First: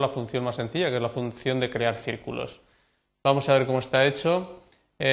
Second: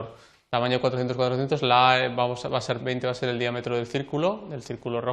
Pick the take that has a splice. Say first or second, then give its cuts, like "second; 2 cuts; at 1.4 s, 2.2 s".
second; 1 cut; at 2.8 s